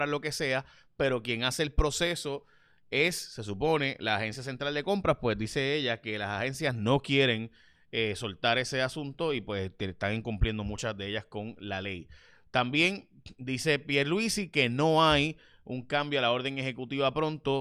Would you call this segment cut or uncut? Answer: uncut